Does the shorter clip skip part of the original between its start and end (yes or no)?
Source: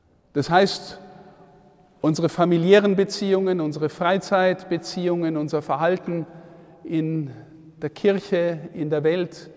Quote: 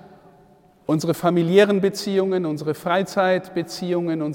no